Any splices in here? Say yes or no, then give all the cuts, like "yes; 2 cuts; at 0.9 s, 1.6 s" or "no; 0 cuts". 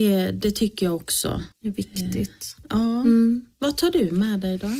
yes; 1 cut; at 1.5 s